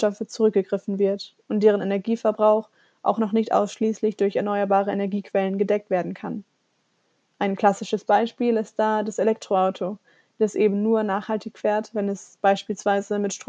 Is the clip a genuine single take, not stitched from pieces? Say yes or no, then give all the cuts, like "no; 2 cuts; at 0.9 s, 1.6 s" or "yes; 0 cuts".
yes; 0 cuts